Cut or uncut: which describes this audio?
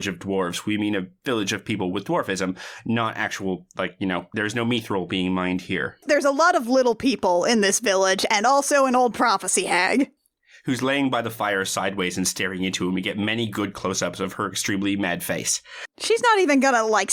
uncut